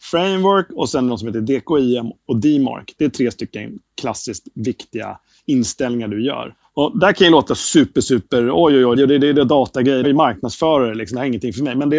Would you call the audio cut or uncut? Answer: cut